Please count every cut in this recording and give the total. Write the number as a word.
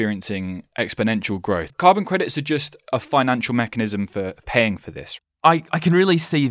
one